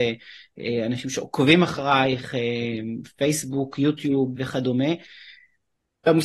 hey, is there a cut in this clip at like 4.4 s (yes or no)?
yes